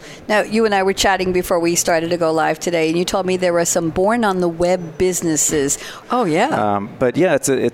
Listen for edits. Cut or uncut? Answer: cut